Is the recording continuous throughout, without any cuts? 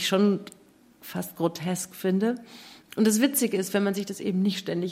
no; 1 cut; at 2.9 s

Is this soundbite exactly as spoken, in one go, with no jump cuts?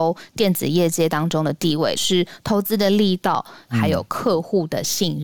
no; 2 cuts; at 2.0 s, 3.7 s

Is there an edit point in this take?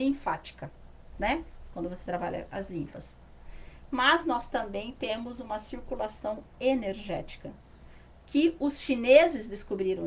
no; 0 cuts

